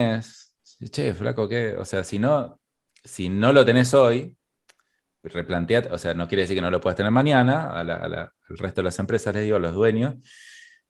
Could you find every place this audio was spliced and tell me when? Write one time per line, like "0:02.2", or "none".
none